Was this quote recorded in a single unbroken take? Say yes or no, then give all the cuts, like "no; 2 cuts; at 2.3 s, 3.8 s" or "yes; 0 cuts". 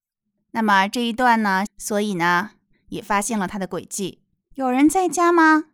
no; 2 cuts; at 1.7 s, 4.4 s